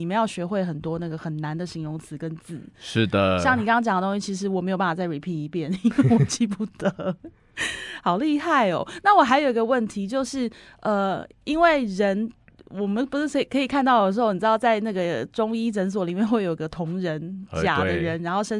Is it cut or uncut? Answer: uncut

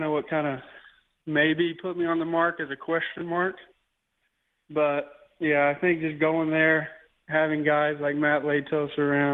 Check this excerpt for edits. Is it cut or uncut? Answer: uncut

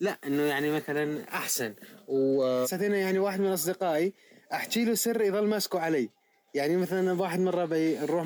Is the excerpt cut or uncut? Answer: cut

